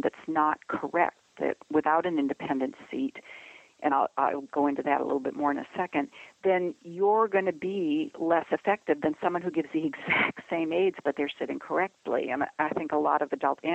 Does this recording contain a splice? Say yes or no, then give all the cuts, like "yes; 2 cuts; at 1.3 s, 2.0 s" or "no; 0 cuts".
no; 0 cuts